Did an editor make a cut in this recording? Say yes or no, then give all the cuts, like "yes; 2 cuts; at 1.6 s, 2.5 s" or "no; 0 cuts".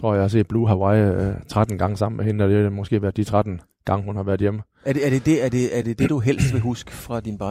no; 0 cuts